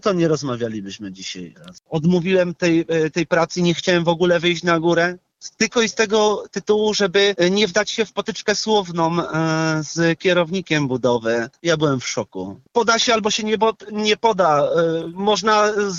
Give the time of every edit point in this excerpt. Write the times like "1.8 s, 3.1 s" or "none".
11.6 s, 12.7 s